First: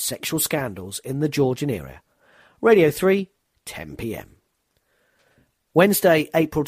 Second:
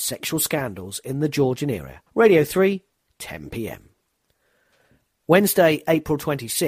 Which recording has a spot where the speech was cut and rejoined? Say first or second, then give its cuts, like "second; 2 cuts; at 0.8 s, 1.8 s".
second; 1 cut; at 2.1 s